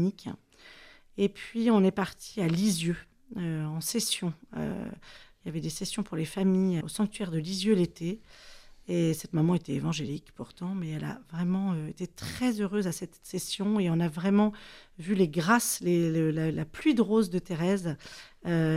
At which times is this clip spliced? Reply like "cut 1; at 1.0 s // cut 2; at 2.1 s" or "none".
cut 1; at 6.8 s // cut 2; at 16.5 s